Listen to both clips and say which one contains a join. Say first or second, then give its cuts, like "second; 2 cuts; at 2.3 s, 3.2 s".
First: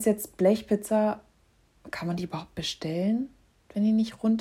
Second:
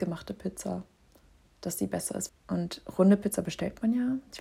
second; 1 cut; at 2.3 s